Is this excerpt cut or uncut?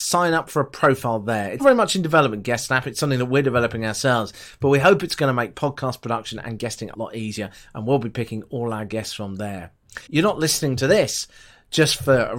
cut